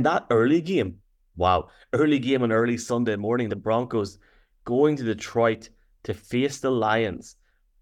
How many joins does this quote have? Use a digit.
2